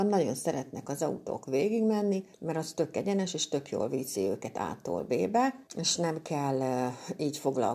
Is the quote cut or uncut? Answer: cut